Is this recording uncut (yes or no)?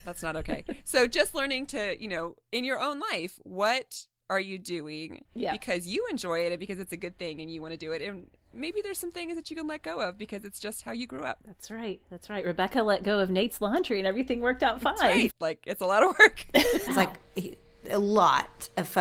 no